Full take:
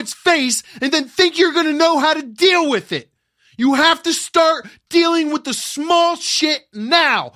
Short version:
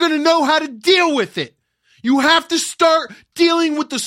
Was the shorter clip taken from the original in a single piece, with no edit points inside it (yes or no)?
yes